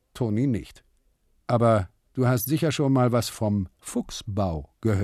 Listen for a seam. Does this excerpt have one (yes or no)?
yes